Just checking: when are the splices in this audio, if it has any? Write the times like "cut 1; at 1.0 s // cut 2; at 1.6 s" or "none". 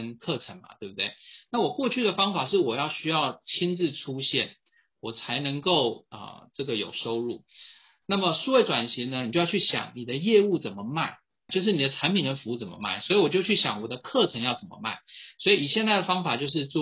cut 1; at 11.5 s